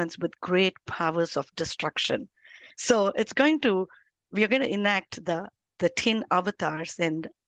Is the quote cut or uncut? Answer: uncut